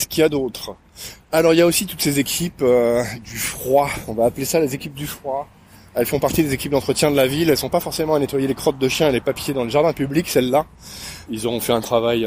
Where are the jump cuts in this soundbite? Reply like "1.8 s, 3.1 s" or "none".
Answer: 11.3 s